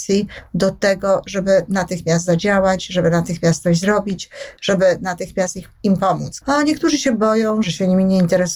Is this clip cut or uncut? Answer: cut